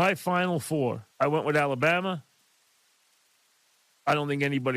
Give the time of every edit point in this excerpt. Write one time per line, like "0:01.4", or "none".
0:01.1